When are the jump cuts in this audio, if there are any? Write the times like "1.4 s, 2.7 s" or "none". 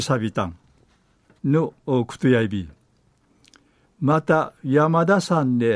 1.4 s